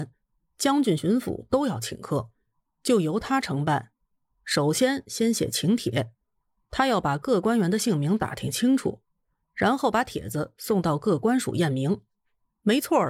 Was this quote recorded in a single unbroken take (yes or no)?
yes